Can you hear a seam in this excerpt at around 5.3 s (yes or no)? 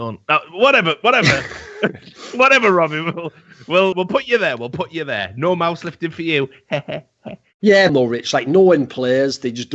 no